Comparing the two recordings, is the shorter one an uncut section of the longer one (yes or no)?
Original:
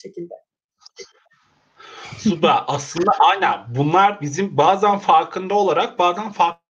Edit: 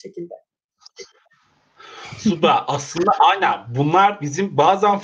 yes